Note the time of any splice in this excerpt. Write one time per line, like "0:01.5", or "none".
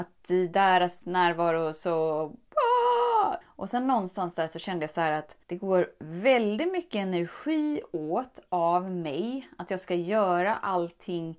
0:03.4
0:05.4